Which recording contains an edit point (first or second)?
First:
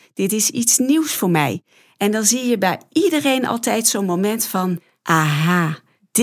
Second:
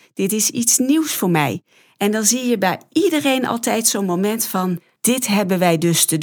second